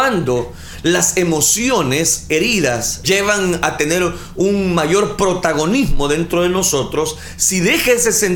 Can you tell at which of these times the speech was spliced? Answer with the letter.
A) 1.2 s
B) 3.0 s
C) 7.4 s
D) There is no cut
B